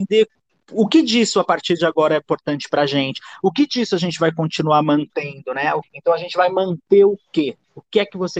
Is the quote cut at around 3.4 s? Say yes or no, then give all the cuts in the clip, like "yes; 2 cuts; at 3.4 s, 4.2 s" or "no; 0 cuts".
no; 1 cut; at 5.8 s